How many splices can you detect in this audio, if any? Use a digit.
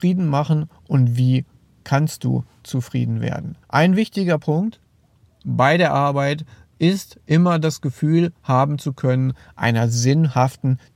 1